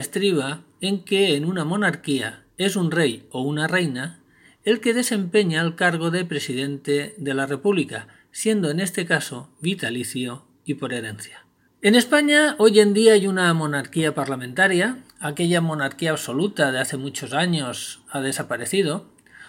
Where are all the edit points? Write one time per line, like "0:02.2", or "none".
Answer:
0:11.7
0:15.1

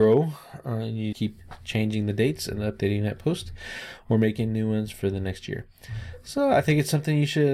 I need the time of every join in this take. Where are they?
0:01.1

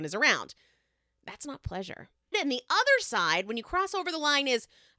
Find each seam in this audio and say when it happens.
0:02.3

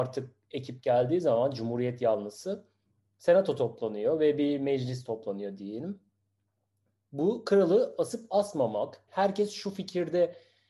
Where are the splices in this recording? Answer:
0:09.1

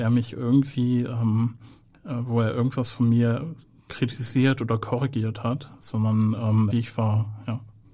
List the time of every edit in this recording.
0:06.7

